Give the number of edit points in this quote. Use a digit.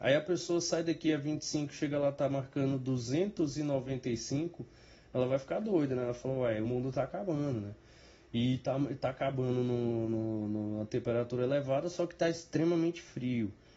1